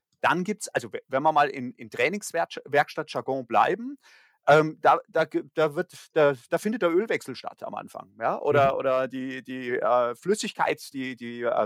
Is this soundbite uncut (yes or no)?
yes